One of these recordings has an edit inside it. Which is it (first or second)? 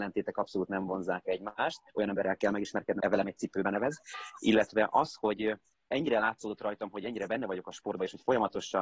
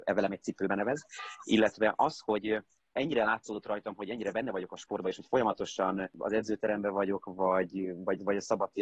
first